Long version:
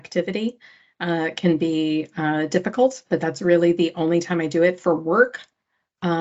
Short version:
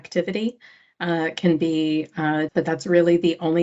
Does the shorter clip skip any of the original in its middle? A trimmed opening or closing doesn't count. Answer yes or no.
yes